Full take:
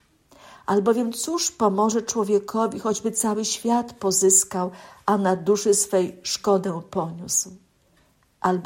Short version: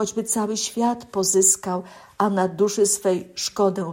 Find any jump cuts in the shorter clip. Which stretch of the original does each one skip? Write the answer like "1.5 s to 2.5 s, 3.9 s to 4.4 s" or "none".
none